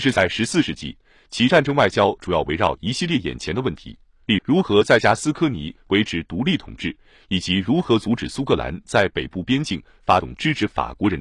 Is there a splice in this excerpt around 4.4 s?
yes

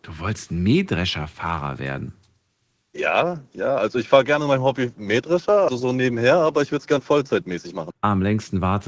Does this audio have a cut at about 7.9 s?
yes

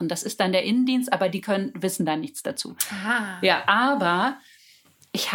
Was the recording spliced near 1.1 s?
no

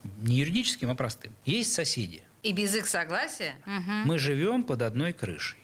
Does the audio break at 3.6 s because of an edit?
yes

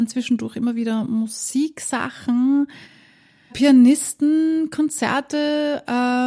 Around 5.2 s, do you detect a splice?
no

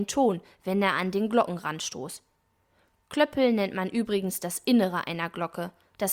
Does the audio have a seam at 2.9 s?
no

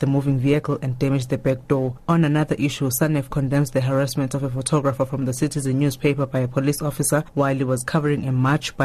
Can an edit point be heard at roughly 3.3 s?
yes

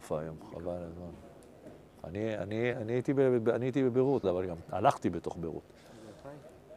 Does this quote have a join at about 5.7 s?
no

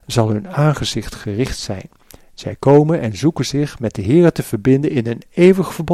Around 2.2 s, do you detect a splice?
no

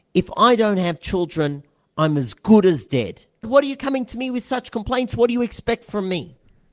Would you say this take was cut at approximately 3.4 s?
yes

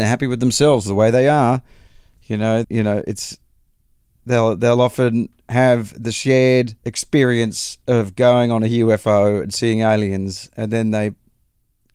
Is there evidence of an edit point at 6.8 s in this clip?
yes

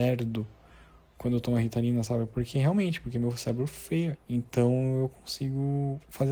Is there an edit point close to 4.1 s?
yes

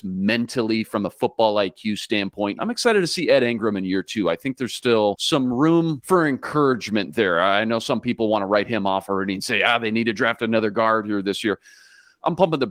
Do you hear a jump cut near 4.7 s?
no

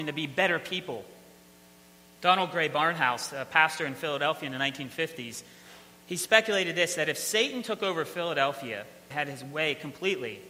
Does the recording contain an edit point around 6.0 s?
no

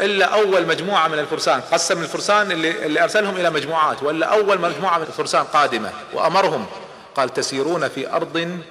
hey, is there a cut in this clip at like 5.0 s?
yes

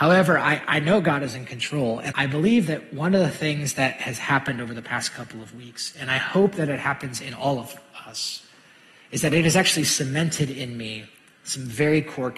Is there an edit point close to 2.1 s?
yes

